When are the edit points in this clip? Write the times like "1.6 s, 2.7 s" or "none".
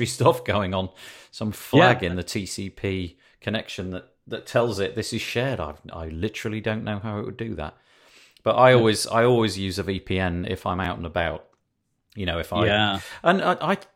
none